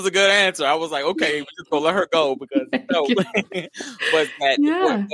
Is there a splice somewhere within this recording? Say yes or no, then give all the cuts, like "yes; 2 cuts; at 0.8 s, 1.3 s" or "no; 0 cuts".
no; 0 cuts